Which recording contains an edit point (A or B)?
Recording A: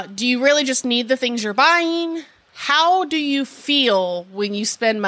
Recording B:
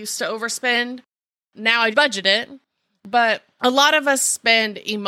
B